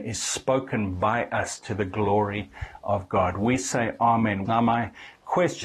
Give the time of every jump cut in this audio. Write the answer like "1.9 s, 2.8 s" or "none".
4.4 s